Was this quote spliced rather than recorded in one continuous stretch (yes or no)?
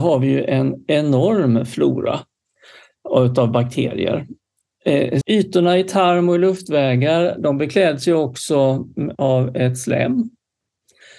yes